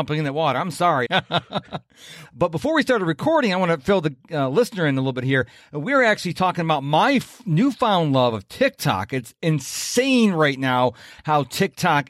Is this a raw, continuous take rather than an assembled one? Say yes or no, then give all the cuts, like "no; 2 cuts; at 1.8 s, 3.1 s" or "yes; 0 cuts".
no; 2 cuts; at 1.1 s, 2.2 s